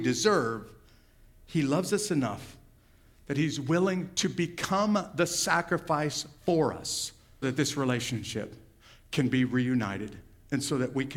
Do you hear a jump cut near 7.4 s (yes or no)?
yes